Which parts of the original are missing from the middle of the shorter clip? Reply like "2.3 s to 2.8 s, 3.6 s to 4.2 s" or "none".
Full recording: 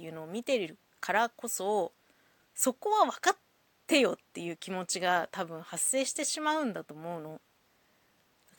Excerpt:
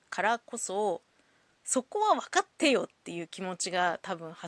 3.4 s to 3.8 s